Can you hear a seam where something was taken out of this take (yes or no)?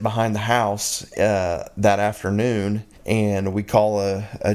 yes